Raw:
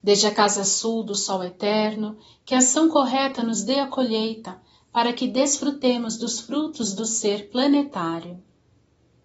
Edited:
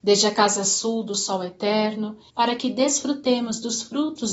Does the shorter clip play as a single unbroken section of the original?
no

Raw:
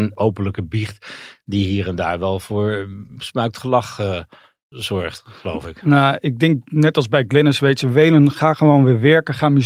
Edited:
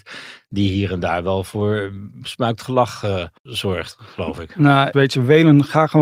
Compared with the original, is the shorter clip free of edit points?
no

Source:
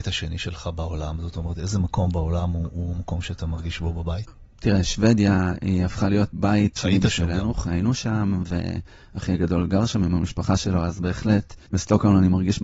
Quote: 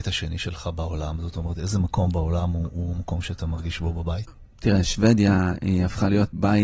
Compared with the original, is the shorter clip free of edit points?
yes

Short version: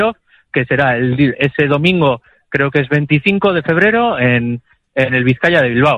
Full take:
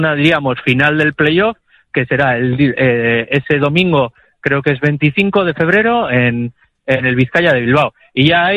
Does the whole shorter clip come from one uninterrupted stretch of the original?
no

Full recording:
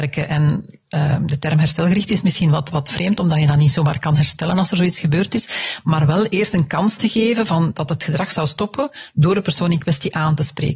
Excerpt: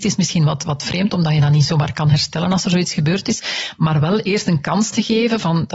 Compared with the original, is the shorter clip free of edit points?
yes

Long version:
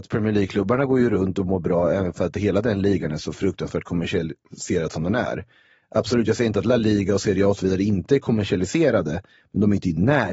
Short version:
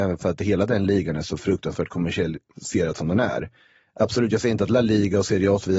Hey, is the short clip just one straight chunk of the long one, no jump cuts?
yes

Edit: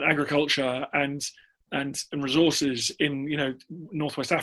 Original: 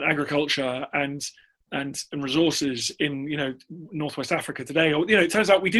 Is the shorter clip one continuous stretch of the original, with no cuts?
yes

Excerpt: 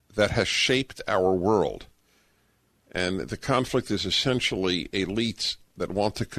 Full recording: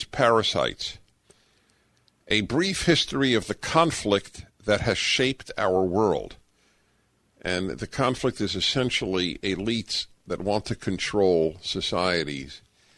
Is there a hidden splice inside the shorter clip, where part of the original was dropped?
no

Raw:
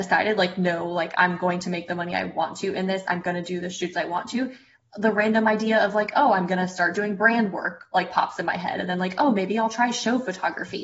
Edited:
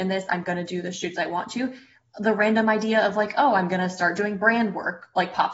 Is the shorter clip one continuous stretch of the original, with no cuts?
yes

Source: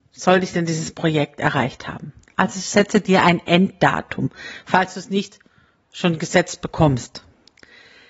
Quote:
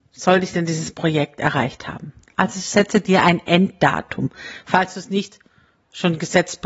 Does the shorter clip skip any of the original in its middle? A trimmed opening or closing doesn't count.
no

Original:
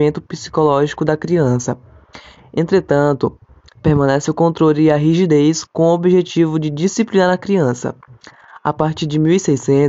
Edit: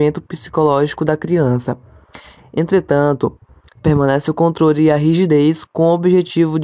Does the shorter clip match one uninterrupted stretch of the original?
yes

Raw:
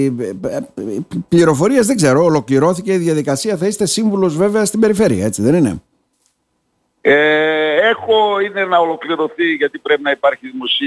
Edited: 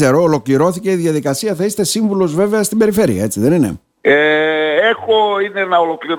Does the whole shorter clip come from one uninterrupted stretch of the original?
no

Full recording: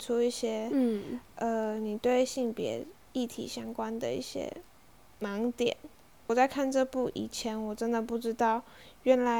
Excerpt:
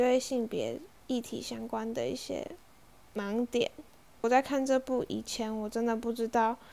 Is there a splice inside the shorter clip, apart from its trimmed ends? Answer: no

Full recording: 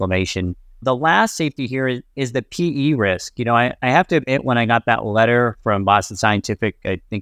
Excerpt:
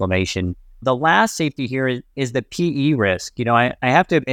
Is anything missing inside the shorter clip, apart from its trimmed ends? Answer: no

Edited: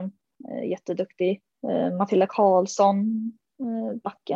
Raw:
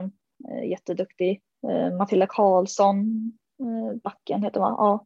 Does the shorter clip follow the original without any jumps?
yes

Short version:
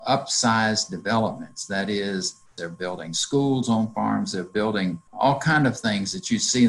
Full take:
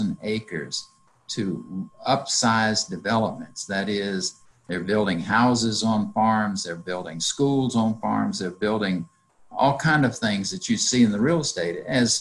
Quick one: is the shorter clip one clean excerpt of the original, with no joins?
no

